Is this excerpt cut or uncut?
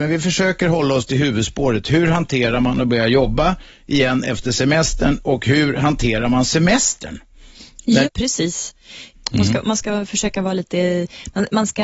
cut